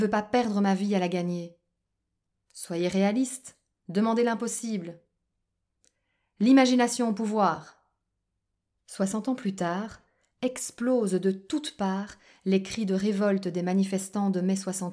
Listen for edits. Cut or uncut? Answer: cut